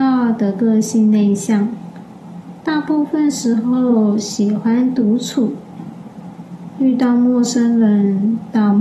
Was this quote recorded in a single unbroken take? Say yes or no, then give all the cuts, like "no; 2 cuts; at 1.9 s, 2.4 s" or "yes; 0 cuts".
yes; 0 cuts